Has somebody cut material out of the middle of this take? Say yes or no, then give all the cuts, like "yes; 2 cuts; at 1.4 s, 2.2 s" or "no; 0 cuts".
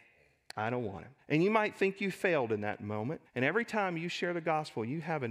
yes; 2 cuts; at 1.2 s, 3.2 s